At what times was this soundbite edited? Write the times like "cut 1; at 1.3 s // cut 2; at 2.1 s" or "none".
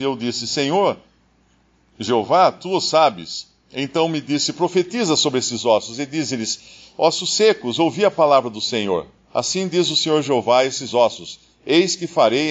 none